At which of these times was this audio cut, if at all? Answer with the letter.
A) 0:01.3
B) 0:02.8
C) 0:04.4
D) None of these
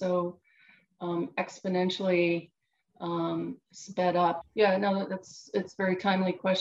C